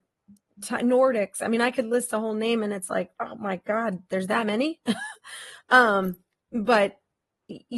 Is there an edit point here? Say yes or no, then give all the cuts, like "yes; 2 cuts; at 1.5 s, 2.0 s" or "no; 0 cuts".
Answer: no; 0 cuts